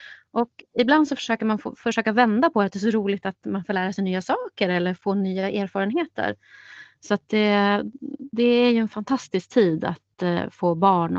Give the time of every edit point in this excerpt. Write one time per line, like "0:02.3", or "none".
0:08.3